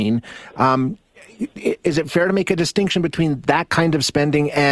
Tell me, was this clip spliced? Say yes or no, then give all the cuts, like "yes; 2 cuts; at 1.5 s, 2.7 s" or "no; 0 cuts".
no; 0 cuts